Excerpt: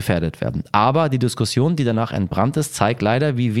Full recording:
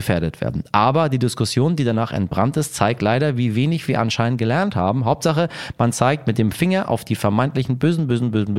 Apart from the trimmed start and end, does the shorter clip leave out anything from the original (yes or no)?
no